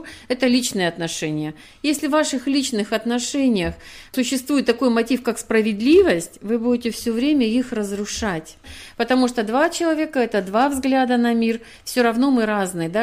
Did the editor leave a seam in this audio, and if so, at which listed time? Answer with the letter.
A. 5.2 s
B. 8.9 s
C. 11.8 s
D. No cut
D